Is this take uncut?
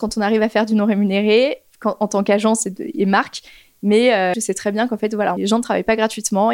no; 2 cuts; at 4.3 s, 5.4 s

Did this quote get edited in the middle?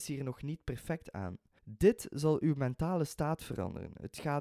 yes; 1 cut; at 1.6 s

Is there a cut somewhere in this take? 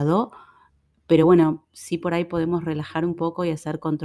no; 0 cuts

